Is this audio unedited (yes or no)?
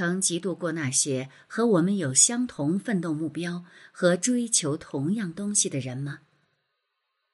yes